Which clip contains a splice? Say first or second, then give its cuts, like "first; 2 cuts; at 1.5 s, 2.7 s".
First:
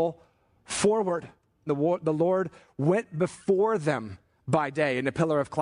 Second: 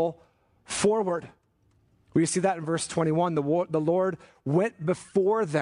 first; 1 cut; at 1.7 s